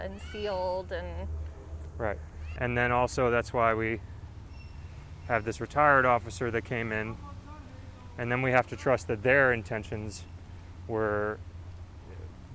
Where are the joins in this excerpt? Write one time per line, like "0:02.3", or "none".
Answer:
0:02.6